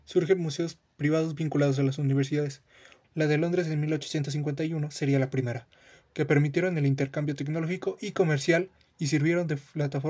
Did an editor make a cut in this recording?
yes; 2 cuts; at 3.0 s, 6.0 s

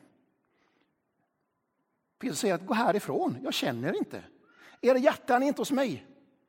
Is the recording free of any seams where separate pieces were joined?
yes; 0 cuts

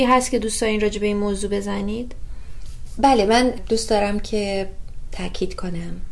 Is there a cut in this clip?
no; 0 cuts

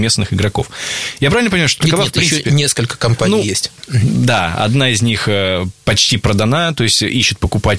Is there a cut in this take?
no; 0 cuts

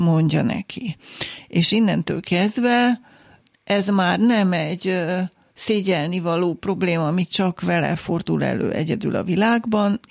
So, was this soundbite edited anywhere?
no; 0 cuts

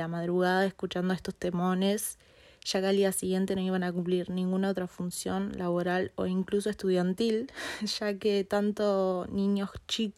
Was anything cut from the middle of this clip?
no; 0 cuts

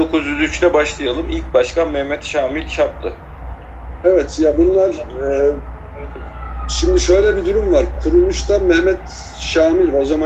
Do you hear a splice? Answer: no; 0 cuts

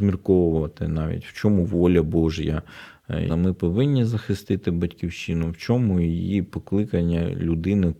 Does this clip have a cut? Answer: yes; 1 cut; at 3.3 s

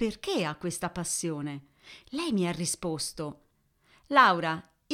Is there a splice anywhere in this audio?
no; 0 cuts

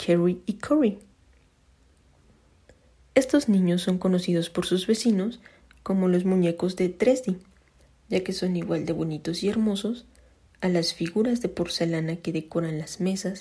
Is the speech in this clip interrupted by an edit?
no; 0 cuts

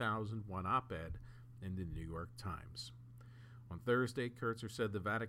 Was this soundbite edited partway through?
no; 0 cuts

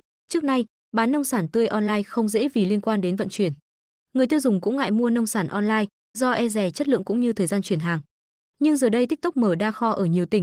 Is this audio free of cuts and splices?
yes; 0 cuts

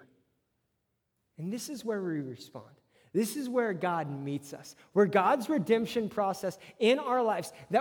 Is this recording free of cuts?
yes; 0 cuts

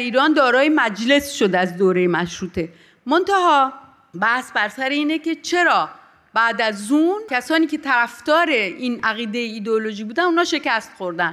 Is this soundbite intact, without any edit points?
yes; 0 cuts

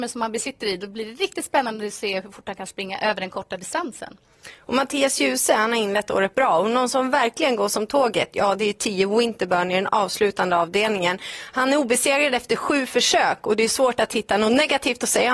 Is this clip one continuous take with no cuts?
yes; 0 cuts

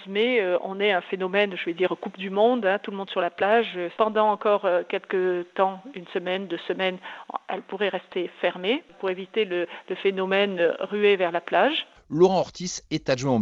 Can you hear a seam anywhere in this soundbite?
yes; 2 cuts; at 3.9 s, 11.9 s

